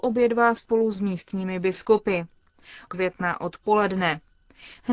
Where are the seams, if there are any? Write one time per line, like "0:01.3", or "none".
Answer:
0:02.9